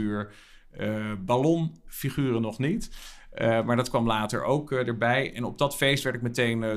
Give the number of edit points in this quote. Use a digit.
0